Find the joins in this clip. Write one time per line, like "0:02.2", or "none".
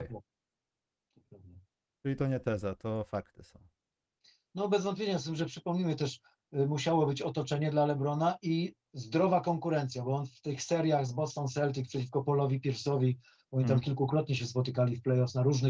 none